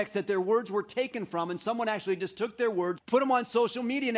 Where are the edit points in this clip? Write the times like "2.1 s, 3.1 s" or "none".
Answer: 3.0 s